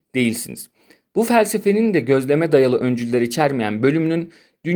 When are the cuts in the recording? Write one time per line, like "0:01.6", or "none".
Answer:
none